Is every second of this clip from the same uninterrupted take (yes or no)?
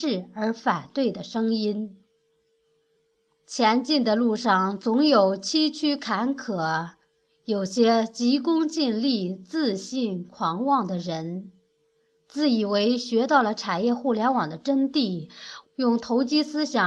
no